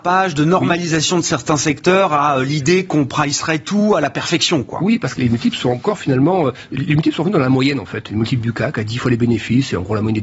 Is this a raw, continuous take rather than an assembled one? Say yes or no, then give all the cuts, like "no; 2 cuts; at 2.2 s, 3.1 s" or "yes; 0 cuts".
yes; 0 cuts